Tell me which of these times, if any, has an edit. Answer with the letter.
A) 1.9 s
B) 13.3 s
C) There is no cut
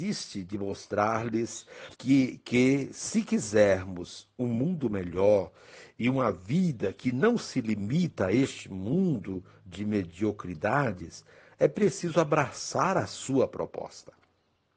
A